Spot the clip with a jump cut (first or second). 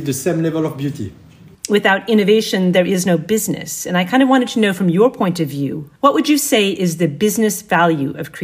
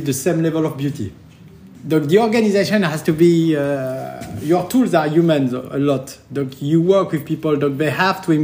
first